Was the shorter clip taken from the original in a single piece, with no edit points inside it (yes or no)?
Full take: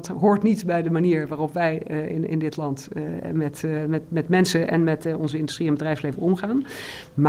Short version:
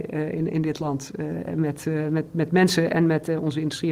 yes